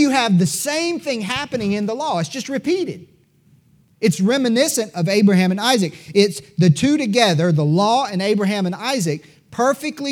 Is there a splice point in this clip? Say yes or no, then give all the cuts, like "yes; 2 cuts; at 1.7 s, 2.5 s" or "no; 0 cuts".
no; 0 cuts